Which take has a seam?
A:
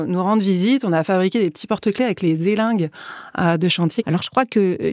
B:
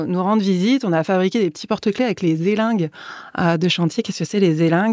A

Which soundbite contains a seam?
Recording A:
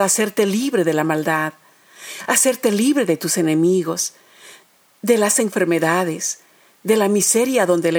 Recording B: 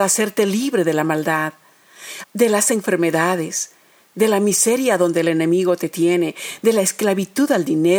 B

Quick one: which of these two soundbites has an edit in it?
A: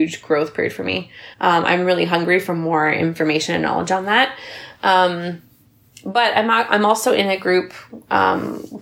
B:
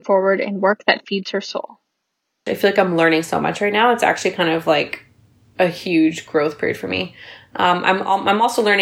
A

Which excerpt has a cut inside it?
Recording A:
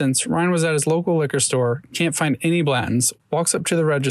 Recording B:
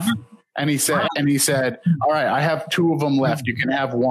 B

